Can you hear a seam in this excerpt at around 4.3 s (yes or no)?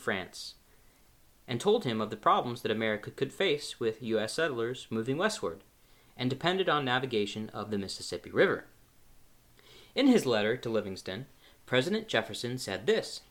no